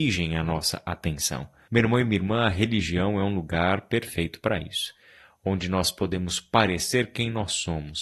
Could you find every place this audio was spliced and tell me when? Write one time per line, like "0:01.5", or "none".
0:01.7